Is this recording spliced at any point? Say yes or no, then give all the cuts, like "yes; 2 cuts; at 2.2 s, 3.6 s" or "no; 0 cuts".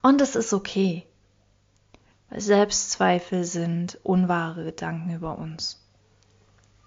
yes; 1 cut; at 2.1 s